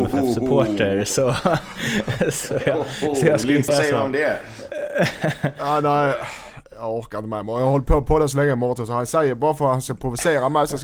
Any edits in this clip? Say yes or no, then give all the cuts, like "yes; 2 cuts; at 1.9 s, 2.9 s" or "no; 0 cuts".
yes; 1 cut; at 3.7 s